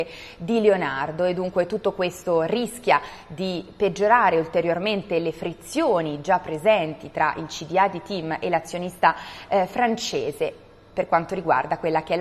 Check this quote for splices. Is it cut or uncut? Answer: uncut